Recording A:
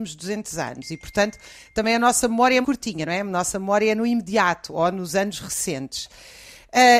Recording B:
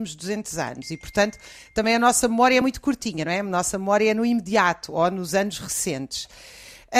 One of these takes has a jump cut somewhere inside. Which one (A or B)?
A